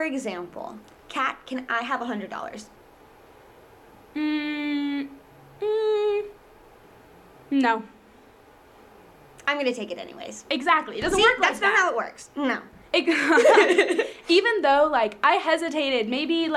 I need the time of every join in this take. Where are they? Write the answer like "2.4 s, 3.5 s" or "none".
12.9 s